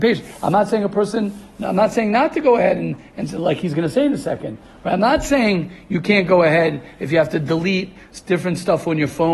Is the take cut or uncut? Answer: uncut